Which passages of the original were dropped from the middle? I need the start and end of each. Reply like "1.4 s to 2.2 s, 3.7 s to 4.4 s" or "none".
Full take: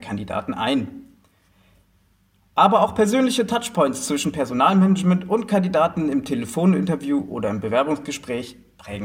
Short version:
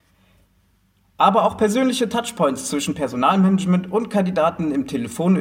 none